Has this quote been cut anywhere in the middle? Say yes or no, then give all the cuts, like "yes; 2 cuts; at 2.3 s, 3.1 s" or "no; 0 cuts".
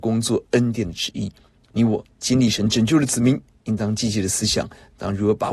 no; 0 cuts